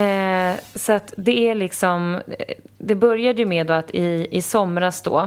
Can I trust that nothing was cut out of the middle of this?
yes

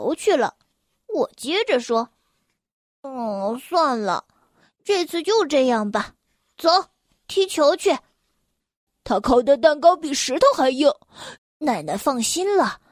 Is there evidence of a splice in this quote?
yes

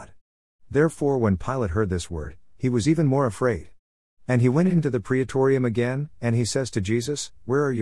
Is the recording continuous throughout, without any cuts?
yes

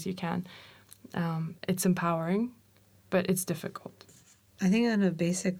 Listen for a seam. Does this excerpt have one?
no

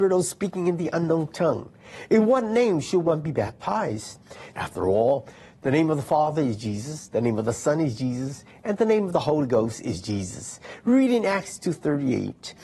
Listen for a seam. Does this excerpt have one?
yes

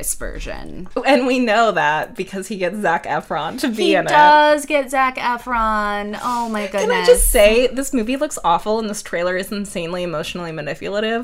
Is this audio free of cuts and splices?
yes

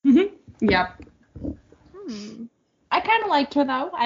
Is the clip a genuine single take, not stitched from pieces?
yes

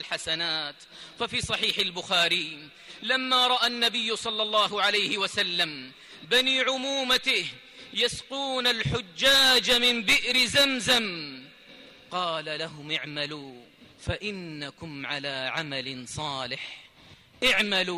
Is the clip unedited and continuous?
no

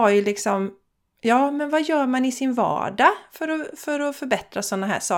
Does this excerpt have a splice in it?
no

